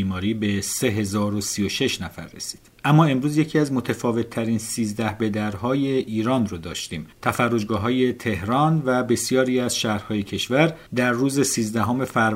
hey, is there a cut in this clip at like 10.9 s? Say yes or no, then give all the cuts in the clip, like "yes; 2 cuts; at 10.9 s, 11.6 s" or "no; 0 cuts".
yes; 2 cuts; at 7.1 s, 10.9 s